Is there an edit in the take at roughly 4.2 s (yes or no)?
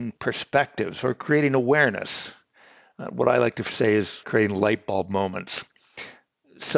yes